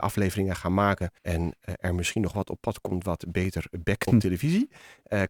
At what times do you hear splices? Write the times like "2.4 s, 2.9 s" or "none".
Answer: 1.2 s, 4.1 s